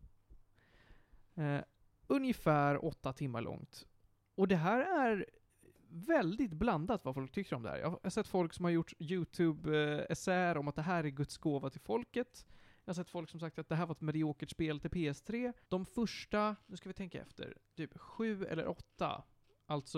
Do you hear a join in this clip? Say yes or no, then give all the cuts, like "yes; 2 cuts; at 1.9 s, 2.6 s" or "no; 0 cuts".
yes; 1 cut; at 15.6 s